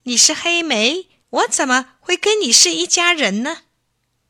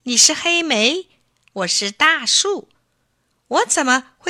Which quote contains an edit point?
first; 1 cut; at 1.2 s

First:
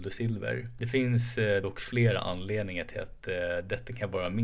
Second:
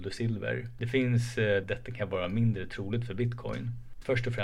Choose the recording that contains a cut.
second; 1 cut; at 1.6 s

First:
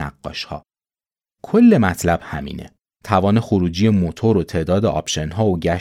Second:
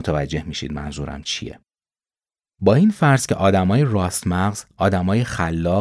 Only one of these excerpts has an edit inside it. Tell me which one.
first; 2 cuts; at 1.4 s, 2.9 s

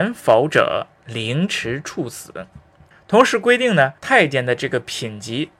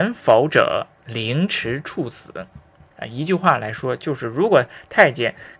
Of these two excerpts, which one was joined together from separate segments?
first; 2 cuts; at 2.9 s, 4.0 s

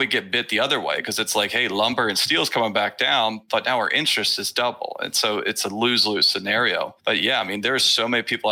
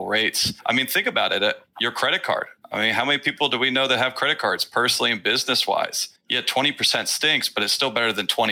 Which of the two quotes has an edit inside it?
second; 1 cut; at 6.2 s

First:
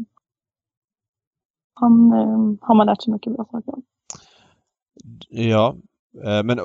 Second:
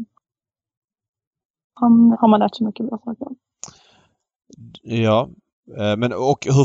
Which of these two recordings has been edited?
second; 1 cut; at 2.1 s

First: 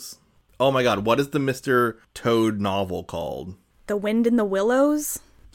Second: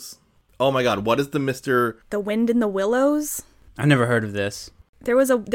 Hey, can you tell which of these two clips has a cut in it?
second; 1 cut; at 2.0 s

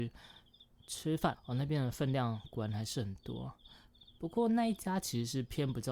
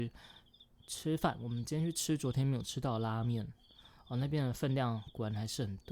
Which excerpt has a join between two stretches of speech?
first; 1 cut; at 1.3 s

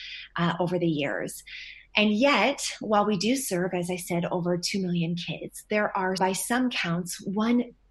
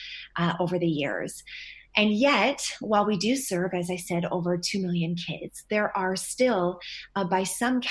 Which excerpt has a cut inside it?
first; 1 cut; at 6.2 s

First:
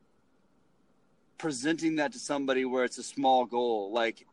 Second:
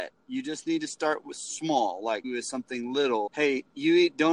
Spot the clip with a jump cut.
second; 2 cuts; at 2.2 s, 3.3 s

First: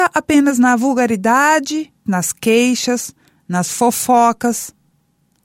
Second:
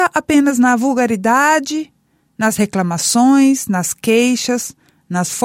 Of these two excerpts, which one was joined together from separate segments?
first; 1 cut; at 2.1 s

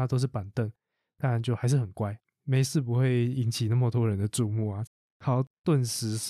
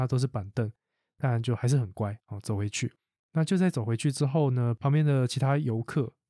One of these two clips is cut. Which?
first; 2 cuts; at 2.2 s, 4.9 s

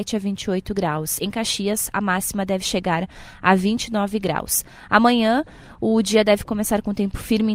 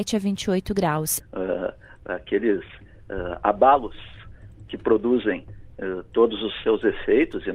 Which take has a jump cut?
second; 1 cut; at 1.2 s

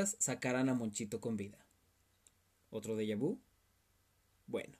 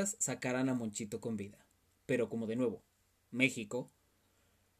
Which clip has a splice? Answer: second; 1 cut; at 1.9 s

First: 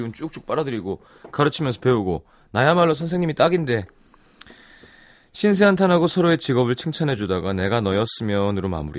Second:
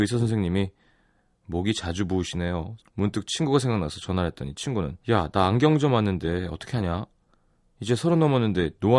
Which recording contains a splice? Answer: second; 2 cuts; at 2.8 s, 5.0 s

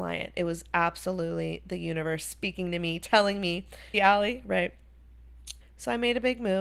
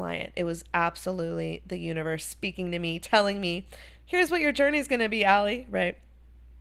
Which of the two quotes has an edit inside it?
first; 2 cuts; at 3.9 s, 5.6 s

